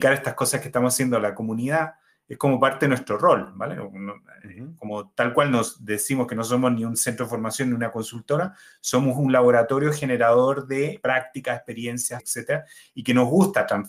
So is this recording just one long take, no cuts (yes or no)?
no